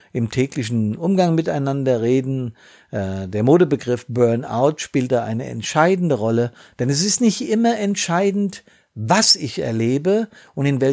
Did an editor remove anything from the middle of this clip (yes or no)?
no